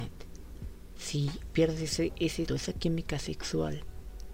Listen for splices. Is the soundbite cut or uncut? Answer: cut